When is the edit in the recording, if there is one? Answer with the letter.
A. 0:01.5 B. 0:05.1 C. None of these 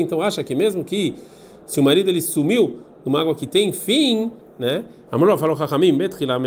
B